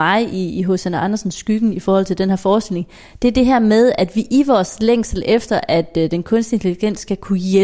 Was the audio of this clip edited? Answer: no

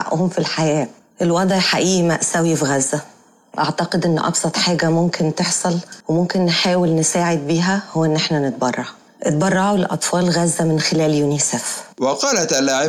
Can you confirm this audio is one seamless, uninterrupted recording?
no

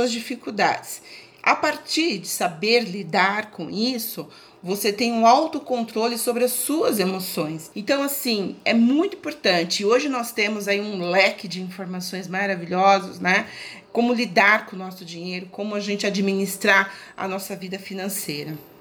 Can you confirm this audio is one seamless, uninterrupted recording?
no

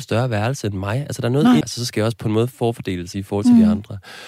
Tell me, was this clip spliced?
yes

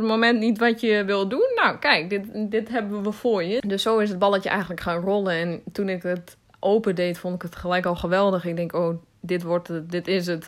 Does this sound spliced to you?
yes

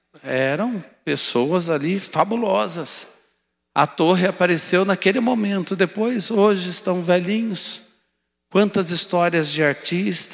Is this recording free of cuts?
yes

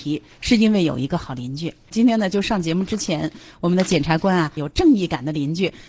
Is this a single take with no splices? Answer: no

